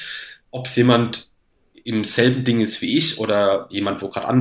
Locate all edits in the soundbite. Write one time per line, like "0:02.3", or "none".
none